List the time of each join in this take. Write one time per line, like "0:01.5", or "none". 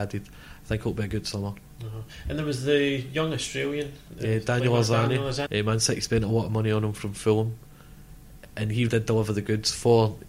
0:05.5
0:08.9